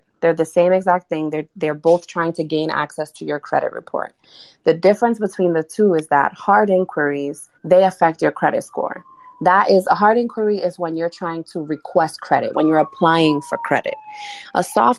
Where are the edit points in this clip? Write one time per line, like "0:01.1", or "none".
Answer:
0:07.6
0:12.5